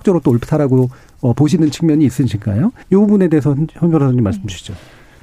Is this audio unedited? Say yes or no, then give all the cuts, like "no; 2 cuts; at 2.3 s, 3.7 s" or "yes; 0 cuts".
no; 1 cut; at 2.8 s